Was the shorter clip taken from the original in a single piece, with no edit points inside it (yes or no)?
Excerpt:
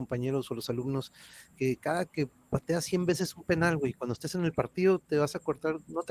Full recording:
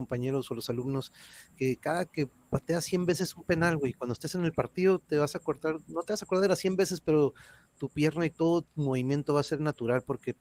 yes